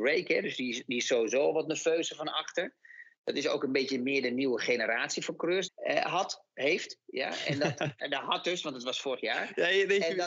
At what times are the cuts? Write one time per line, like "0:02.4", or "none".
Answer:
0:05.7
0:08.0